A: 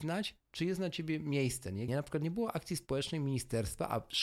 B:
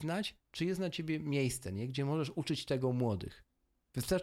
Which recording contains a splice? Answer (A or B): A